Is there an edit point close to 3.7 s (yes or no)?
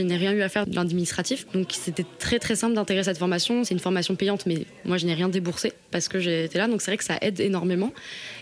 no